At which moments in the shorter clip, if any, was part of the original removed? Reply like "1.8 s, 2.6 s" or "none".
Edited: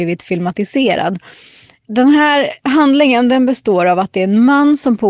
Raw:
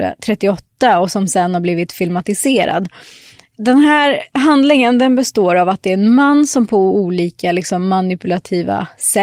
none